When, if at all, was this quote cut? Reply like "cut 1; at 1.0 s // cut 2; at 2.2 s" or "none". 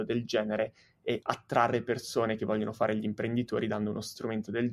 none